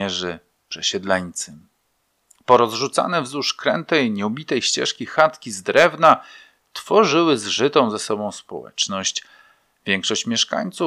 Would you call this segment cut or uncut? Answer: uncut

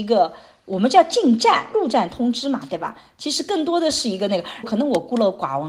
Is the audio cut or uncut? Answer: cut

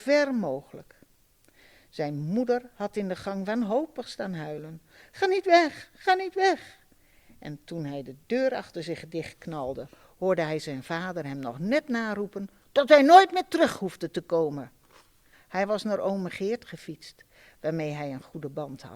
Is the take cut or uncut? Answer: cut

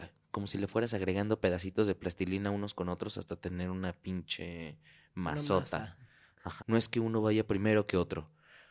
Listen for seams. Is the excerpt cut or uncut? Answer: cut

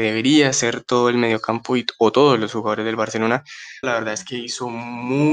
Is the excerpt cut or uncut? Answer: cut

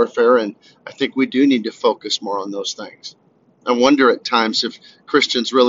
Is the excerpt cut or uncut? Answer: uncut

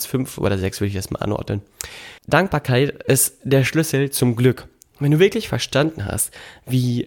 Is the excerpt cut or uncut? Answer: cut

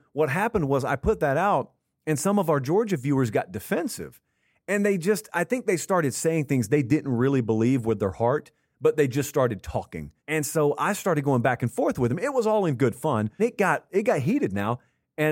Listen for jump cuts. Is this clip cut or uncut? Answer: cut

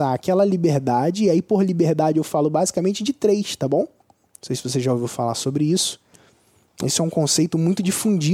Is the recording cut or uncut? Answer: cut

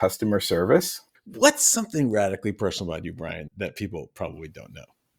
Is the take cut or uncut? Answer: cut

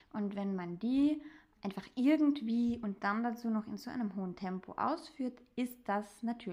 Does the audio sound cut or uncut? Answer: cut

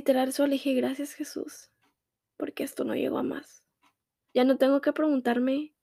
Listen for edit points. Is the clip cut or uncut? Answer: cut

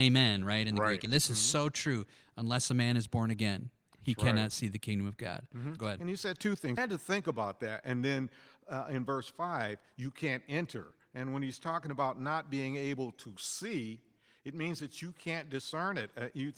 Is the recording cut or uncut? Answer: cut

